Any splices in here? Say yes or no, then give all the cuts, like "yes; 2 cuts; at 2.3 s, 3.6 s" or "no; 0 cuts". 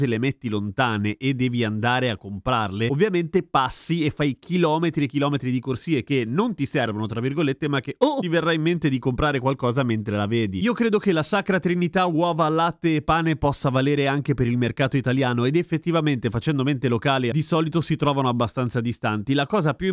no; 0 cuts